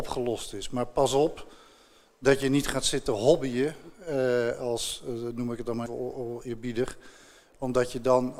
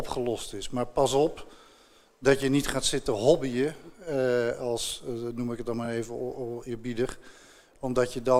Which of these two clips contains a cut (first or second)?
first